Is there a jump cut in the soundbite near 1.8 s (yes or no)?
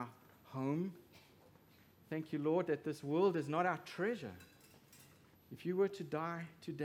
no